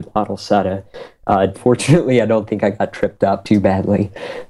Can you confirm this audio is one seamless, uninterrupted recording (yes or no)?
no